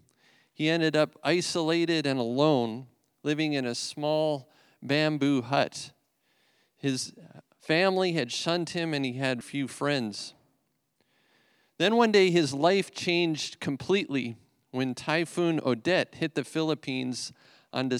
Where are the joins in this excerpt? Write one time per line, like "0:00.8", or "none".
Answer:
0:09.4